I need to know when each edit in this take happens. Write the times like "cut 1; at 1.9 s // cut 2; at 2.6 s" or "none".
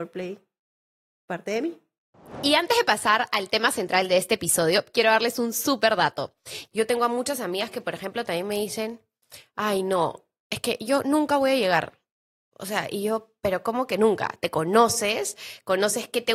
cut 1; at 6.7 s